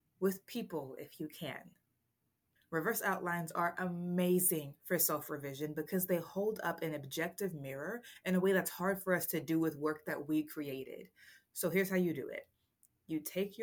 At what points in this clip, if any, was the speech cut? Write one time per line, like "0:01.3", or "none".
0:02.6